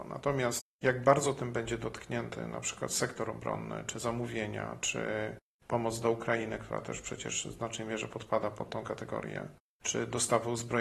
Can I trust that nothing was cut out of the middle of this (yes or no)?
yes